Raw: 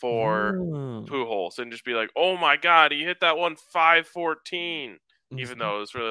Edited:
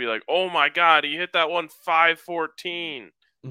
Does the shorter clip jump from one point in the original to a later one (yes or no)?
no